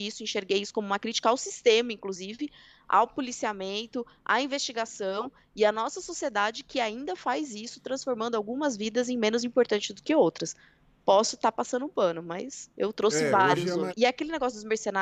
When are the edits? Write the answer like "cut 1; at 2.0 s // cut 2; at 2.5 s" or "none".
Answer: cut 1; at 13.9 s